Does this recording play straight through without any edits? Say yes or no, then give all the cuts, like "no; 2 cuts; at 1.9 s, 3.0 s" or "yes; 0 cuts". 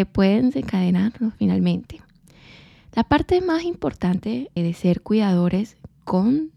no; 1 cut; at 4.6 s